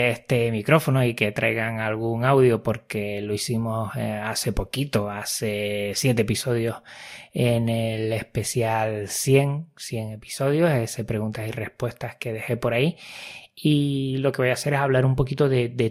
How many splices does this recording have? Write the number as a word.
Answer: zero